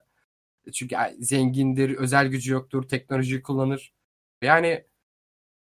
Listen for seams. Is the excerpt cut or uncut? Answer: cut